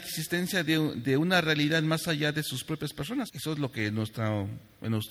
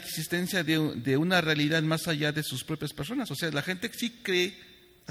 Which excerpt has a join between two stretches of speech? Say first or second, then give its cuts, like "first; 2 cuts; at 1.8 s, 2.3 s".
first; 1 cut; at 3.3 s